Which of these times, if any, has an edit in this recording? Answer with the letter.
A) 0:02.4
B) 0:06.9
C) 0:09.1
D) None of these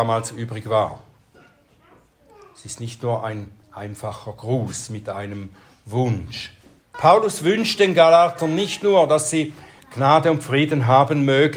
B